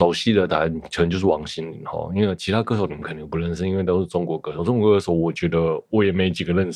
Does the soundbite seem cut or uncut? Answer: uncut